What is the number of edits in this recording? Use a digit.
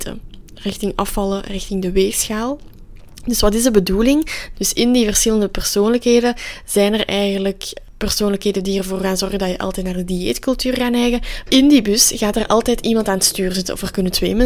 2